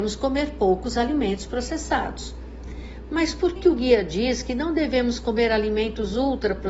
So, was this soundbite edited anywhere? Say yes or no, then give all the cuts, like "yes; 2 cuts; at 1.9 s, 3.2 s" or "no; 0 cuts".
yes; 1 cut; at 3.6 s